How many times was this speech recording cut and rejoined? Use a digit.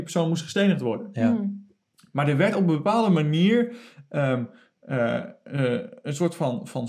0